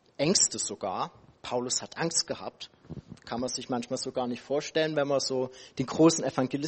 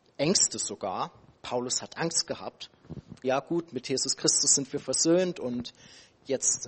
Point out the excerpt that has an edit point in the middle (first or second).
second